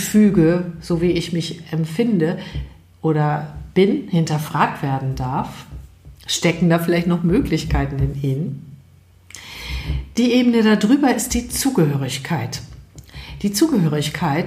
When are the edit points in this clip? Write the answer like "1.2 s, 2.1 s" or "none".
none